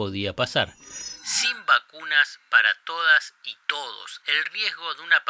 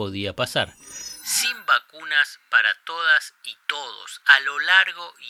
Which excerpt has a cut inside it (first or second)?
first